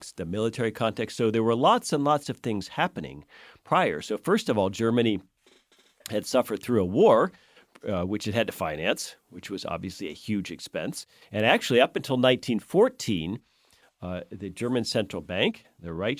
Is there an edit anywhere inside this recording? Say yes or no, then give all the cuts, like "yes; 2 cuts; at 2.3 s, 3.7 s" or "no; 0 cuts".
no; 0 cuts